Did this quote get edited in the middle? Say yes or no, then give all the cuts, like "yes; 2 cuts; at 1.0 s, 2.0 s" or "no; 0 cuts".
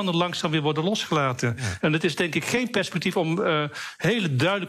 yes; 1 cut; at 1.8 s